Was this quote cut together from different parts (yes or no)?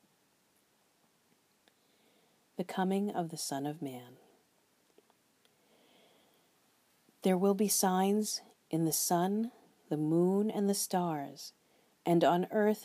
no